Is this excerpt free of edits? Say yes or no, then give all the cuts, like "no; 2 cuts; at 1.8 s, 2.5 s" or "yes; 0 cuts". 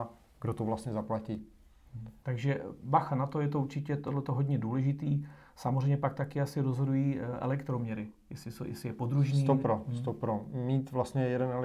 no; 1 cut; at 2.2 s